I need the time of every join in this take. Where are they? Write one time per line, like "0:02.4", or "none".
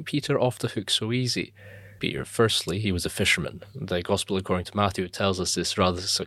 0:02.0